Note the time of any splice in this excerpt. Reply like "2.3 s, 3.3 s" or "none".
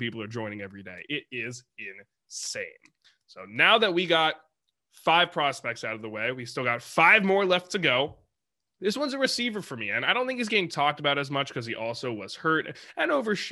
none